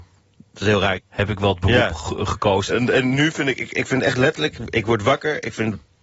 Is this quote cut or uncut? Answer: cut